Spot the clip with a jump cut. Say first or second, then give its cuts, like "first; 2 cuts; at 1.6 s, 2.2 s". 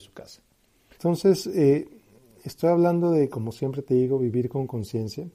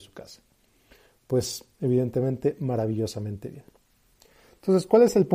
first; 1 cut; at 0.9 s